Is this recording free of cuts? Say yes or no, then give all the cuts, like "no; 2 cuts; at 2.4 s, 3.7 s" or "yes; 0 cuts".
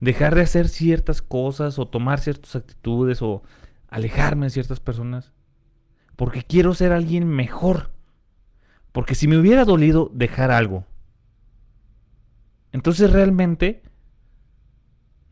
yes; 0 cuts